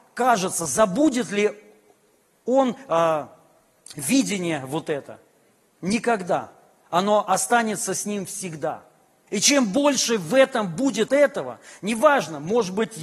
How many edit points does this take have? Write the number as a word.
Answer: two